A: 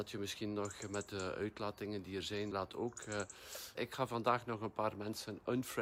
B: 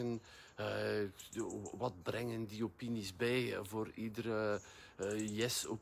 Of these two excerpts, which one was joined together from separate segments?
A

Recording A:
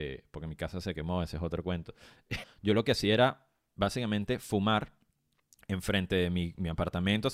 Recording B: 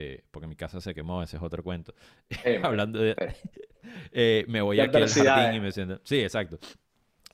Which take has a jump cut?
A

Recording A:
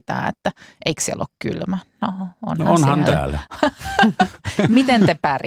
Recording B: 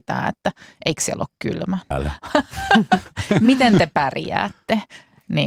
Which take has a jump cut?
B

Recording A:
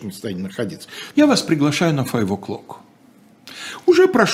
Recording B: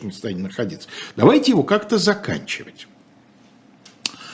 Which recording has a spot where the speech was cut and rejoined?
A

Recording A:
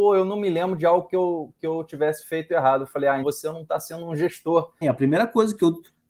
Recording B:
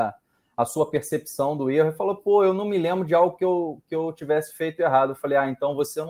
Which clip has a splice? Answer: A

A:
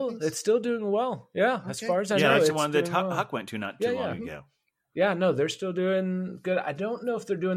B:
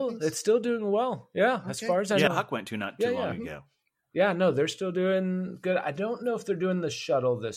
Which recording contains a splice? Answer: B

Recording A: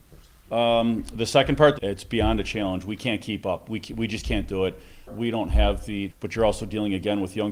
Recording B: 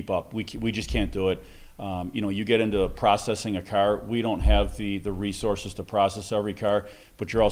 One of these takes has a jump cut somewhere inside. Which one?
A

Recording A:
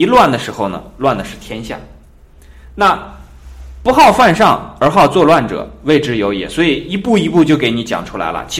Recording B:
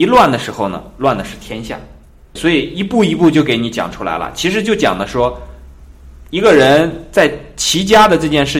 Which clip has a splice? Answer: B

